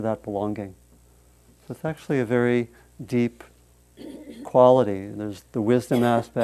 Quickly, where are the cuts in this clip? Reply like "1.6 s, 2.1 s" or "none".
none